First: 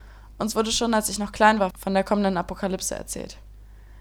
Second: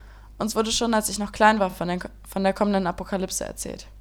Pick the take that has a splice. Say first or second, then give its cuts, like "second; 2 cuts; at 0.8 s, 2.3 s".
first; 1 cut; at 1.7 s